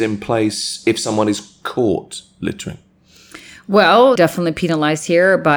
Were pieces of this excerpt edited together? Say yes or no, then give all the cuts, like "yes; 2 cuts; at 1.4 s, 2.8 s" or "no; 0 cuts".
yes; 1 cut; at 4.2 s